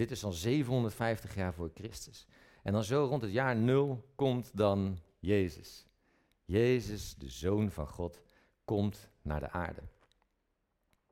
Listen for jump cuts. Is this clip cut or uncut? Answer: uncut